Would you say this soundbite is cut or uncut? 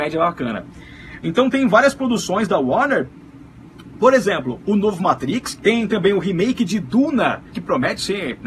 cut